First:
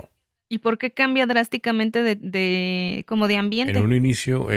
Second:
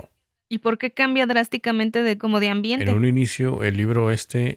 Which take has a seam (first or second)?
second